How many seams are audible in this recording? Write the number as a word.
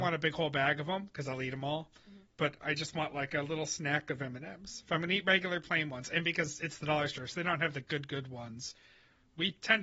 zero